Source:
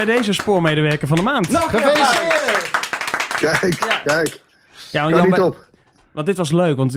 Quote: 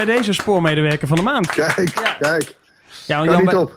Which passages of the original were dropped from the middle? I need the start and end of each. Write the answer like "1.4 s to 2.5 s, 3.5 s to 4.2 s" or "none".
1.5 s to 3.3 s